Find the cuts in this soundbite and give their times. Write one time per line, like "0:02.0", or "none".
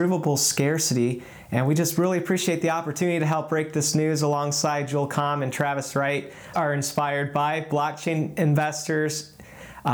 0:06.5

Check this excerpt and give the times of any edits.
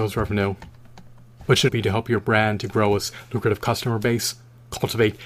0:01.7

